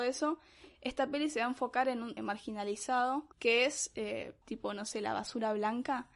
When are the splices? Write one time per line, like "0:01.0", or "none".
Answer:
0:02.2
0:03.3
0:04.4